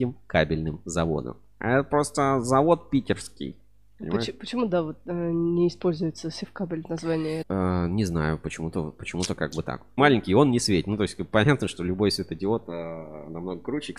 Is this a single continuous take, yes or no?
no